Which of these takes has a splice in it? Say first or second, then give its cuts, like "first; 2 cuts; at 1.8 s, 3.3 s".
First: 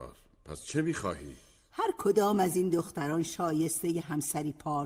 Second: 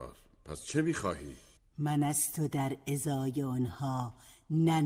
second; 1 cut; at 1.6 s